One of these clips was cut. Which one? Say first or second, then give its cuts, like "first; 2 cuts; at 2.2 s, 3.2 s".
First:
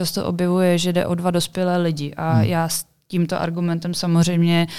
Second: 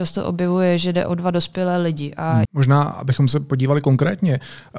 second; 1 cut; at 2.4 s